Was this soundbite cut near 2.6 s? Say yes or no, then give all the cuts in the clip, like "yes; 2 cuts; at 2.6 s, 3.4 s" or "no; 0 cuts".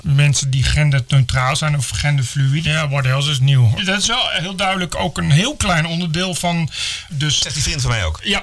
yes; 3 cuts; at 2.6 s, 3.8 s, 7.1 s